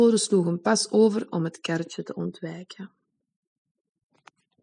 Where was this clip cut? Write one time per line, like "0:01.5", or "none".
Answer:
none